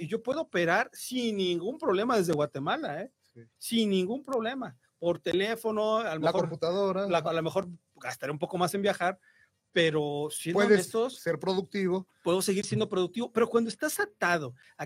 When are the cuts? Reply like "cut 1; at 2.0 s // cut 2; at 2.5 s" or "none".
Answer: cut 1; at 7.2 s